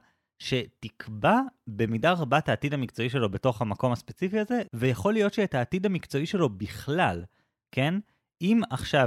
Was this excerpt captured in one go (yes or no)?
yes